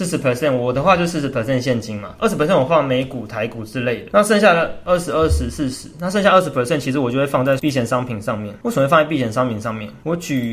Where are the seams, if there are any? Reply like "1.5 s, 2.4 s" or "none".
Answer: 4.1 s